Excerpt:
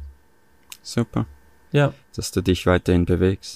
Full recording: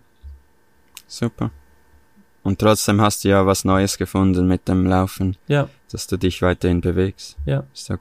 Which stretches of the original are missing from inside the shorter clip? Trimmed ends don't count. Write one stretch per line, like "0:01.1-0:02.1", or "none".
0:01.9-0:05.4